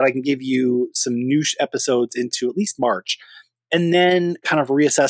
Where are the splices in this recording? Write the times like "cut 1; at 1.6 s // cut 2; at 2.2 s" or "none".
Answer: none